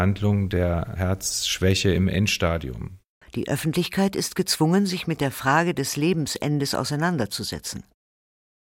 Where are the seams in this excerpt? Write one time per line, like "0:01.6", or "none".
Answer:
0:03.2